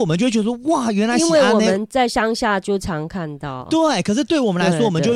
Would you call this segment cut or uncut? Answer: uncut